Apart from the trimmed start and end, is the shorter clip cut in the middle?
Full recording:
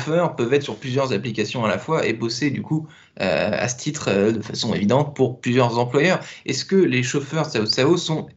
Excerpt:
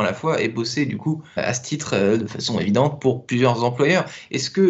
yes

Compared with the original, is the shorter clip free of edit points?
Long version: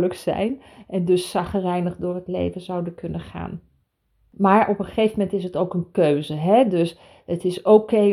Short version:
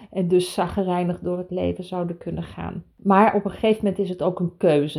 no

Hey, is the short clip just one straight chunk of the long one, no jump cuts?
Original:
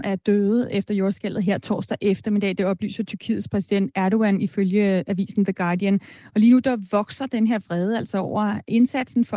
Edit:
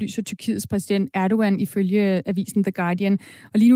yes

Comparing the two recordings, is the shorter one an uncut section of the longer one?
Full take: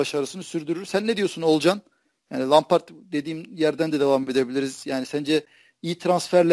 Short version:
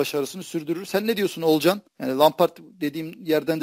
no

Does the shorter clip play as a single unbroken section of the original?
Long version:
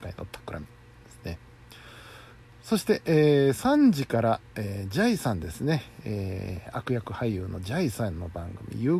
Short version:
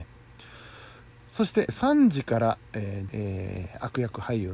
no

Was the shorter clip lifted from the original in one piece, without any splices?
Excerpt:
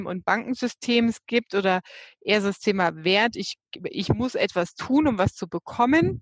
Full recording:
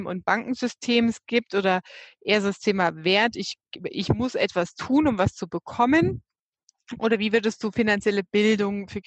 yes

